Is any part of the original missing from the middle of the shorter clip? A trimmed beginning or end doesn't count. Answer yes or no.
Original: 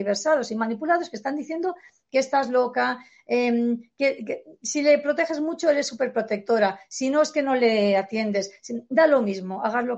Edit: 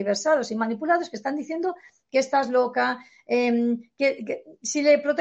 no